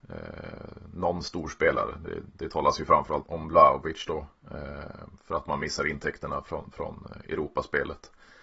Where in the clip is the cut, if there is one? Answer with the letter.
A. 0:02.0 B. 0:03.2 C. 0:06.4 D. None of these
B